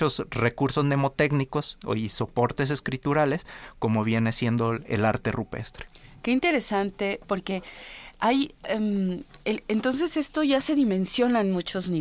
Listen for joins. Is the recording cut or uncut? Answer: cut